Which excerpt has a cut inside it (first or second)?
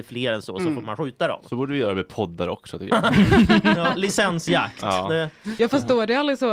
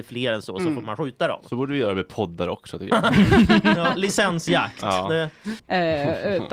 second